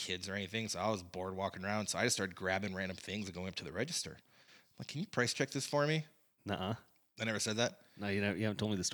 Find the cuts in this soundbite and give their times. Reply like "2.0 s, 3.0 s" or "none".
6.4 s

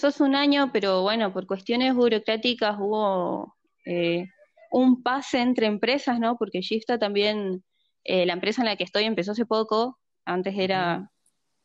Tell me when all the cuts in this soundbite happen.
none

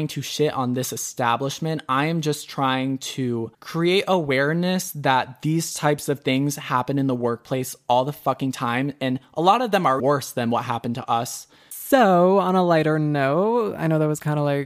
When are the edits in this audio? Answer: 3.5 s, 10.0 s

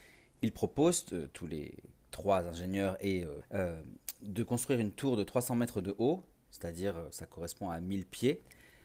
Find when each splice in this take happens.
3.4 s

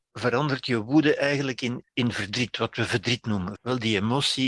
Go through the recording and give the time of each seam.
1.8 s, 3.6 s

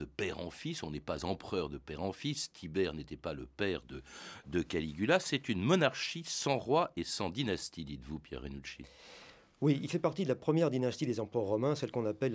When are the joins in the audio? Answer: none

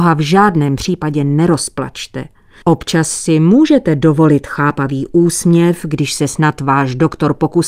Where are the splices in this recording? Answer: 2.6 s

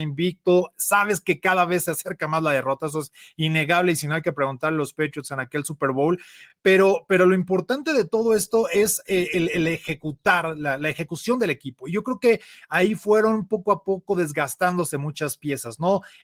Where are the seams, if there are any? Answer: none

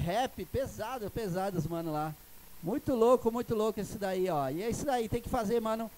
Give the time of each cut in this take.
none

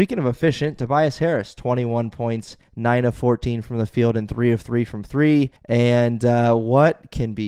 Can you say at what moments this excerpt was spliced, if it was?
5.6 s

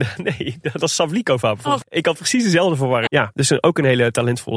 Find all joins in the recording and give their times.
1.8 s, 3.1 s

